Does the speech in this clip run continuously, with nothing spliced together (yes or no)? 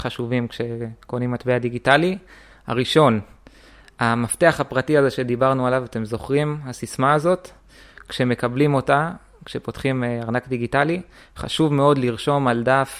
yes